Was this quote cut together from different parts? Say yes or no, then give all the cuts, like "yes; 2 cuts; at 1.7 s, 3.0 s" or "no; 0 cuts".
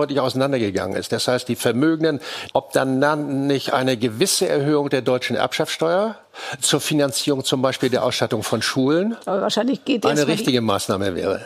yes; 1 cut; at 2.5 s